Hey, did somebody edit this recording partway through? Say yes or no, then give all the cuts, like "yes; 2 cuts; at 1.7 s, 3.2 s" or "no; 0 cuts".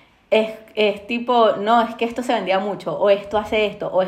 no; 0 cuts